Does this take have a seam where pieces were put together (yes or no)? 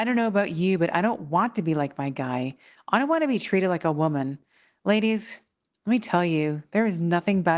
no